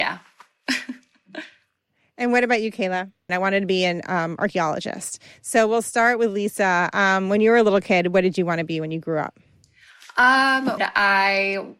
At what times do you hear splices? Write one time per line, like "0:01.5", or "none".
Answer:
0:03.3
0:10.8